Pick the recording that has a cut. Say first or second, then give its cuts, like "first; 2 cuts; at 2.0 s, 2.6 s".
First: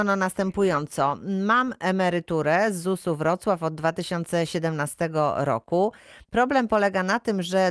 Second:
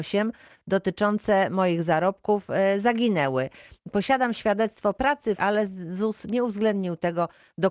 second; 1 cut; at 5.4 s